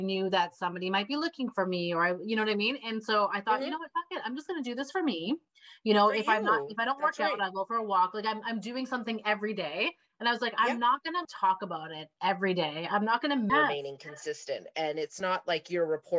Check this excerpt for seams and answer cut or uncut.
cut